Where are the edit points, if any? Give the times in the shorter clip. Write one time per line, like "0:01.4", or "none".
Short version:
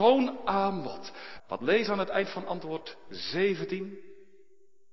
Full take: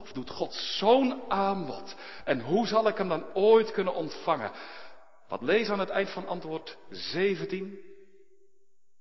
0:01.4